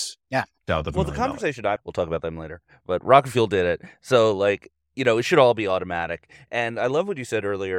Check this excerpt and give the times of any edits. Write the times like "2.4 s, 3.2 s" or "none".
1.8 s